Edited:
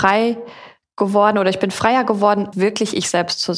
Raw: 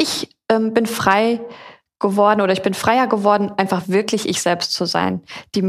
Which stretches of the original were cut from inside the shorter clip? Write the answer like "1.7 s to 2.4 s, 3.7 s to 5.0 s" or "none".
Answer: 3.6 s to 3.8 s